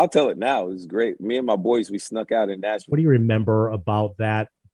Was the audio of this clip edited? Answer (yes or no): yes